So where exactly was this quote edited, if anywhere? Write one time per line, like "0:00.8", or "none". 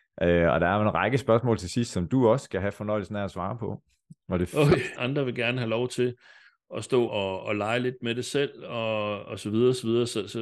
0:05.0
0:07.1